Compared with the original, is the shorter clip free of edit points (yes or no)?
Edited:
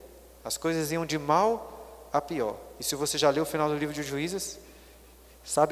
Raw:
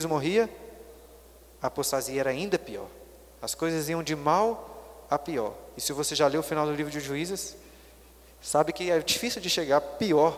yes